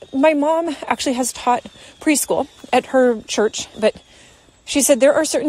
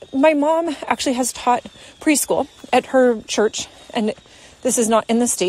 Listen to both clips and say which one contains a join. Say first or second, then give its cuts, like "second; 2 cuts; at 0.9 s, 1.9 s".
first; 1 cut; at 3.7 s